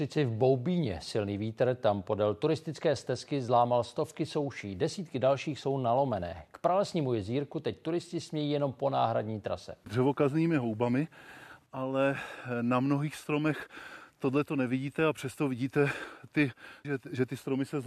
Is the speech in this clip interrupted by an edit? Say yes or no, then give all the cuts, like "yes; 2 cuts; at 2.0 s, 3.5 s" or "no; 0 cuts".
yes; 2 cuts; at 9.8 s, 16.8 s